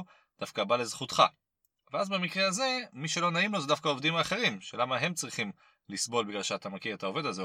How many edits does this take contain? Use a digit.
0